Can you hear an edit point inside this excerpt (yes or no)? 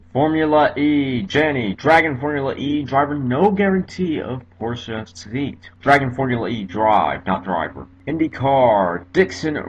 no